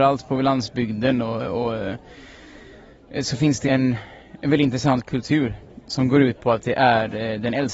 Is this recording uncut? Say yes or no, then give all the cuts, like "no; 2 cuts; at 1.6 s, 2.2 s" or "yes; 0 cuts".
no; 1 cut; at 3.6 s